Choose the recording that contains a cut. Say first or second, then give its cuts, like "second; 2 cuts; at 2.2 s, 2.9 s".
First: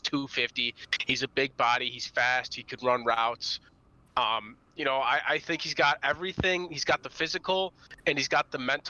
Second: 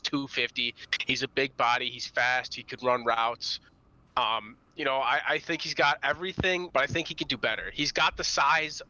second; 1 cut; at 6.7 s